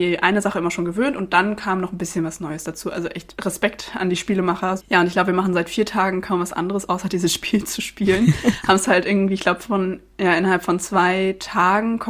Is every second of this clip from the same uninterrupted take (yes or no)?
no